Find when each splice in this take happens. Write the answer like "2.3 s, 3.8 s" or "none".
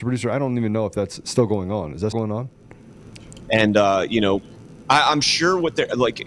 2.1 s, 3.5 s